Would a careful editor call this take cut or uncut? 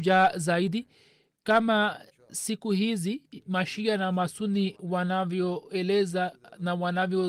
uncut